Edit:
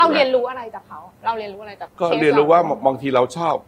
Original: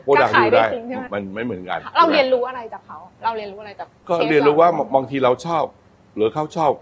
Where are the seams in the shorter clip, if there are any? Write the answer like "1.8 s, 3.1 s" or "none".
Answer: 1.9 s

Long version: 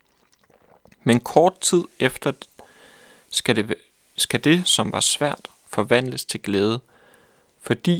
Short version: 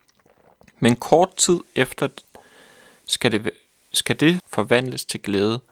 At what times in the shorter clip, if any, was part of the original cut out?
4.4 s

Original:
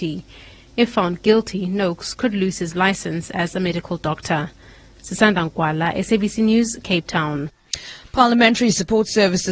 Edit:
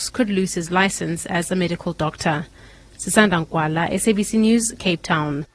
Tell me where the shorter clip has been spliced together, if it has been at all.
none

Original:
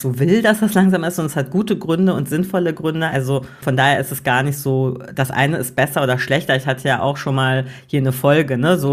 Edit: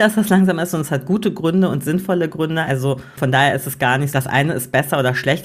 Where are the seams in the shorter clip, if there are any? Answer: 4.1 s

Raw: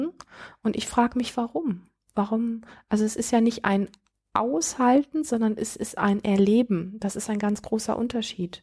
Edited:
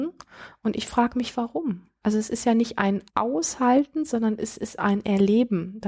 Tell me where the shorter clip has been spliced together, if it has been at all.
2.0 s, 3.1 s

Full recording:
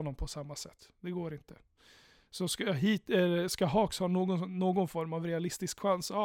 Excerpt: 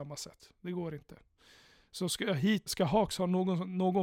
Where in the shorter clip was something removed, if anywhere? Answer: 2.7 s

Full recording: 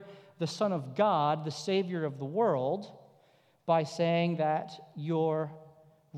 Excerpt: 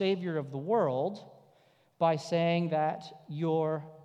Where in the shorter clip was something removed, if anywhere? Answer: none

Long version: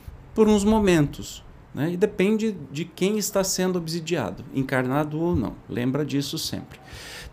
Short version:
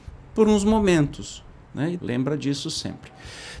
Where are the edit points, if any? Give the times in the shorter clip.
2.0 s

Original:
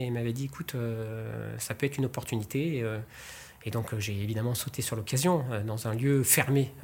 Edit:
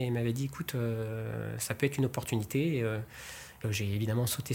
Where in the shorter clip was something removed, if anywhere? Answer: 3.6 s

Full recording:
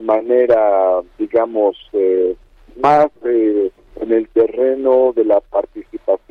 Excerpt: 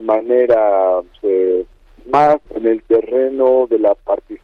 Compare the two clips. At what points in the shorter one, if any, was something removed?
1.1 s, 2.5 s

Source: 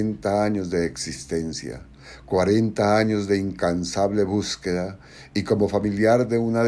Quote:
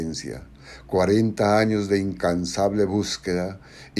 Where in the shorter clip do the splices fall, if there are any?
none

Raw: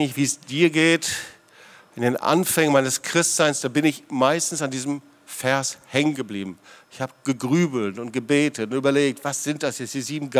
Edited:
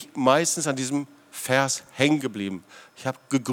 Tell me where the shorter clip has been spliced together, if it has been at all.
none

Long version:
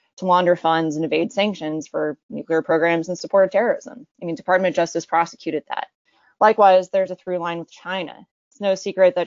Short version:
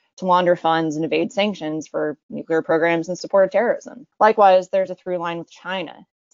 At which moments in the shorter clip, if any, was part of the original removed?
4.1 s

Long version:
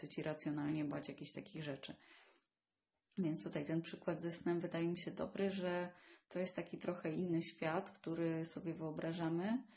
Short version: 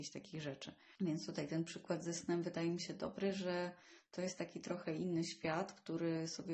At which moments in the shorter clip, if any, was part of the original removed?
1.0 s

